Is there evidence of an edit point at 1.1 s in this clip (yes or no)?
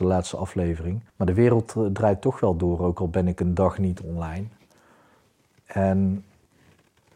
yes